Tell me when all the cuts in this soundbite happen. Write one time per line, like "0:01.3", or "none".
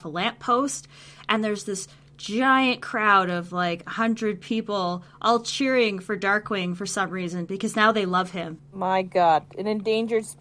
0:08.6